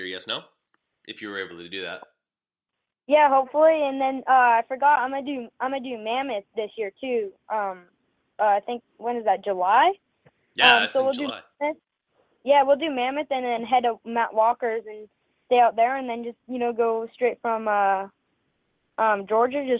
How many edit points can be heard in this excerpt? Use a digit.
0